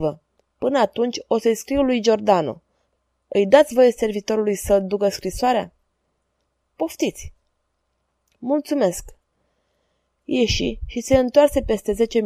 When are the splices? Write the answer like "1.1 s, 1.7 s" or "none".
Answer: none